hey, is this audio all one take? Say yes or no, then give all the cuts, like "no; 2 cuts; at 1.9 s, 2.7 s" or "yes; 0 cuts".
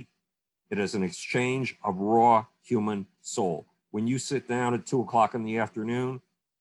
yes; 0 cuts